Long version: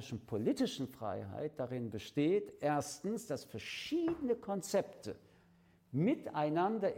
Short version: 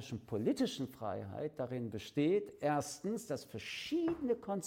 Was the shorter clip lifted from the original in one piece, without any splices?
yes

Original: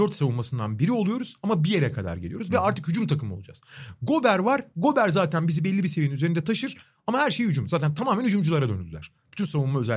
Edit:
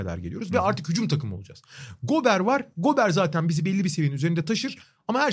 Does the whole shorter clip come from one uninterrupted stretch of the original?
yes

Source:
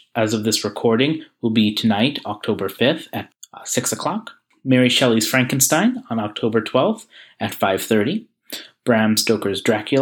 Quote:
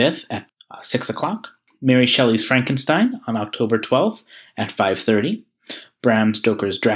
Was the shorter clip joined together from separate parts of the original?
no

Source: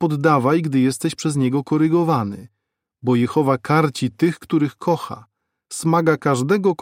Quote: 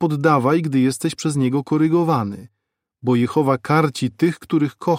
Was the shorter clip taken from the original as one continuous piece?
yes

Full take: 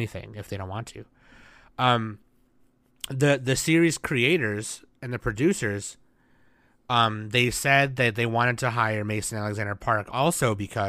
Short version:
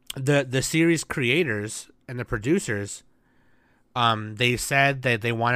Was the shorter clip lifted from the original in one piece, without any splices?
yes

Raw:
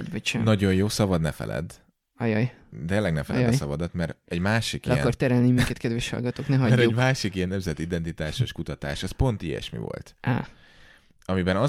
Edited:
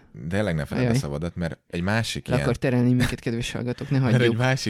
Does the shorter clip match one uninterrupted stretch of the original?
yes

